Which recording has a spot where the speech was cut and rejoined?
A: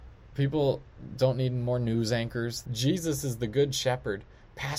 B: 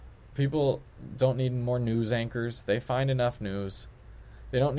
A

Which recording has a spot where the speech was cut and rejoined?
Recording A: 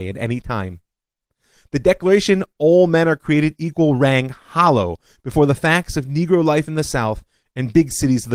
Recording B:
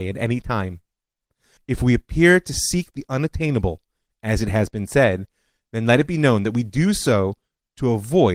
B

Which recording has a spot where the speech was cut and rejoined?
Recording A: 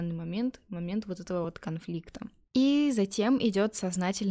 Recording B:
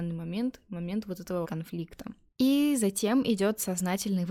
B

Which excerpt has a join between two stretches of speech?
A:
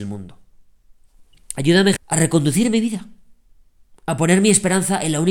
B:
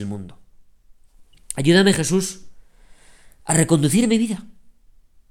A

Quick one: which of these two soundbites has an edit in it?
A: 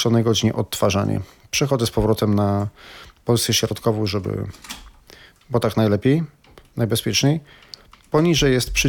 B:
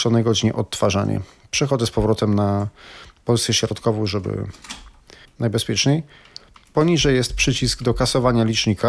B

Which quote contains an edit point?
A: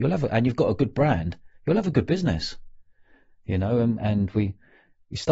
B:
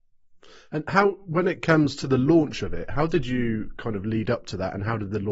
A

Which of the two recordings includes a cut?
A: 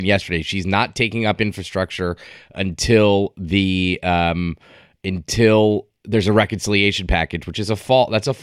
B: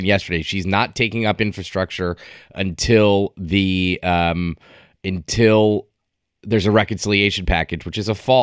A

